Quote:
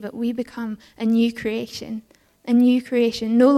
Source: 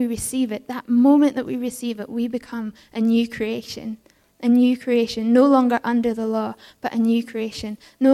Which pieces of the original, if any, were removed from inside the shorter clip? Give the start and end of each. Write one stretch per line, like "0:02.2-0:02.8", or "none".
none